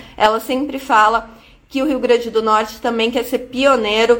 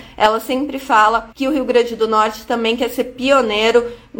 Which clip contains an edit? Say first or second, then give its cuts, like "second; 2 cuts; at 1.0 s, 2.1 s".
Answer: second; 1 cut; at 1.3 s